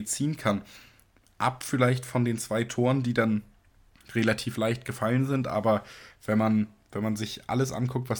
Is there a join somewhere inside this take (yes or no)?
no